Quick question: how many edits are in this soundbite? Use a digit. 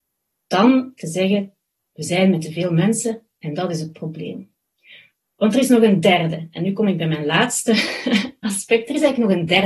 0